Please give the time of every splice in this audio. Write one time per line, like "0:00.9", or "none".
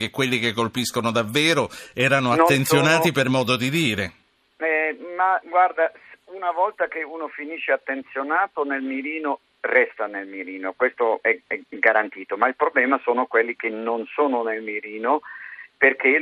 0:05.4